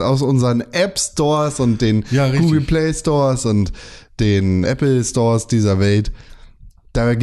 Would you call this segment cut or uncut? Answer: cut